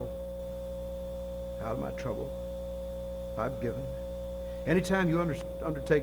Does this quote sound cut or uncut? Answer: uncut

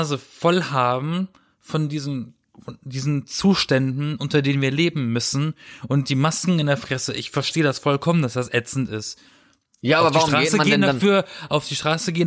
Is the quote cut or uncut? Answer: uncut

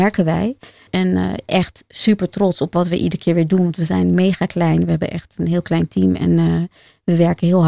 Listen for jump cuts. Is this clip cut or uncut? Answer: cut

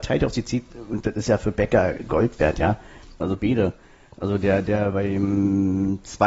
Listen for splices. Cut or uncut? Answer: cut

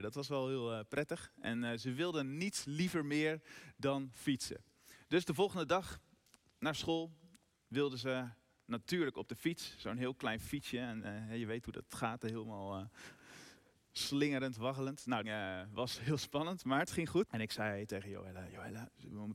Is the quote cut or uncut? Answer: cut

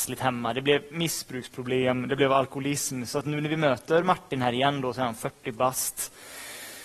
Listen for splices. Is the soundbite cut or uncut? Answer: uncut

